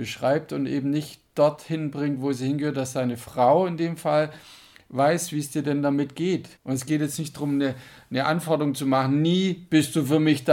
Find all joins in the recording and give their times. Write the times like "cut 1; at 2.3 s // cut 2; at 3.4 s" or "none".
cut 1; at 6.6 s